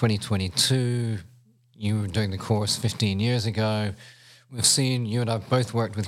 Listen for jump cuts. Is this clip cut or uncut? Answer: uncut